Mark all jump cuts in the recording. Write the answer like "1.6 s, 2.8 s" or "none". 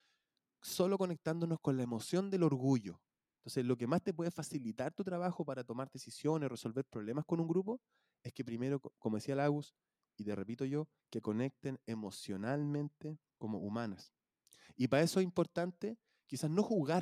3.4 s, 11.0 s, 13.4 s